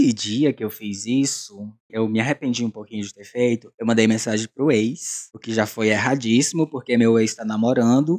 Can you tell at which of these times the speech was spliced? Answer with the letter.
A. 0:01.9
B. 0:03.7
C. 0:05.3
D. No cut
A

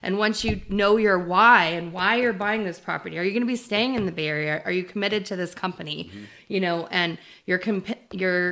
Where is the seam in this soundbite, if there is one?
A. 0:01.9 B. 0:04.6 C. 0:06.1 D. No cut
D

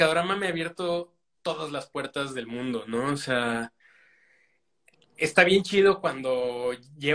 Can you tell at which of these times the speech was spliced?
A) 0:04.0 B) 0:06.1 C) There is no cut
C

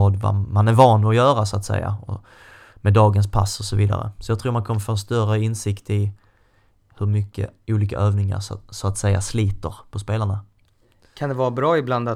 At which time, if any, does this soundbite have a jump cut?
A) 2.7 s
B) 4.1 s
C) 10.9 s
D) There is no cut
D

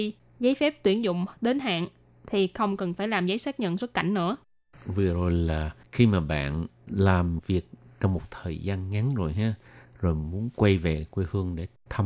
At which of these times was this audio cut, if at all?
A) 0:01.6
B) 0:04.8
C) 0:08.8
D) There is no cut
D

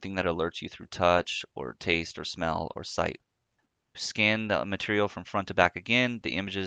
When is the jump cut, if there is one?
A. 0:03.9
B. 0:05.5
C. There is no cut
A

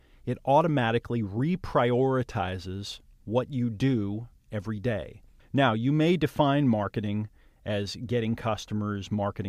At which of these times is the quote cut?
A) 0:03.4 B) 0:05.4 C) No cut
B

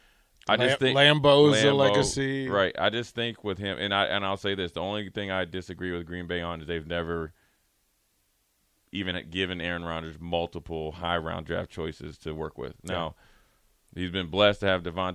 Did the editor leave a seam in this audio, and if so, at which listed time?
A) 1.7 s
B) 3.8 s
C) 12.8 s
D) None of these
D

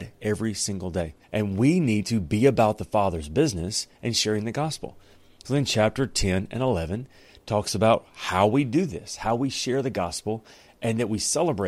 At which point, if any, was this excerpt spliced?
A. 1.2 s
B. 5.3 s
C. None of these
A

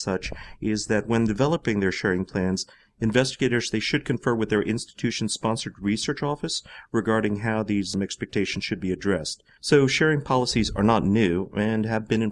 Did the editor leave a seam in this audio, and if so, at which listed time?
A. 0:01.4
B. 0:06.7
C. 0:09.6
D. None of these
C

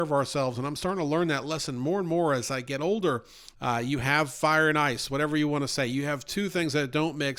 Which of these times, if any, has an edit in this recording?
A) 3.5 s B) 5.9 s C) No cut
A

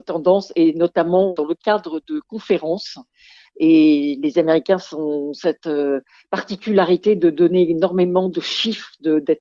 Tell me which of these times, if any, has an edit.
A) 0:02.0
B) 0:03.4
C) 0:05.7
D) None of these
B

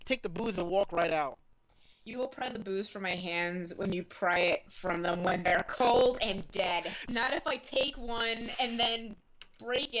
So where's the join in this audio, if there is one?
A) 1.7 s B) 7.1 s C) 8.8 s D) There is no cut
B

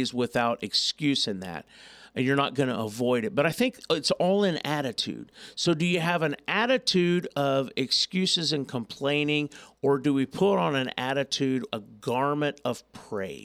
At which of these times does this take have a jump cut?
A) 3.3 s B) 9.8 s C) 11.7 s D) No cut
C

